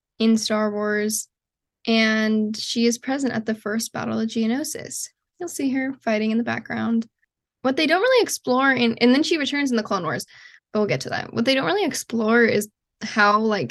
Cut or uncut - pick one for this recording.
cut